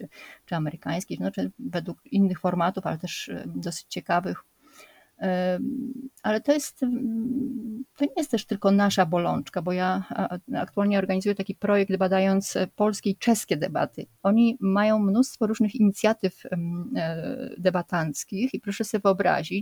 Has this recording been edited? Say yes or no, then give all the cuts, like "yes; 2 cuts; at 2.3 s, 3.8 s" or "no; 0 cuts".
yes; 2 cuts; at 1.5 s, 14.2 s